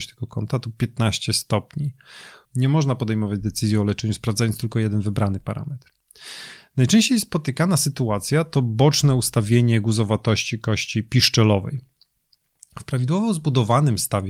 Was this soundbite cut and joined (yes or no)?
yes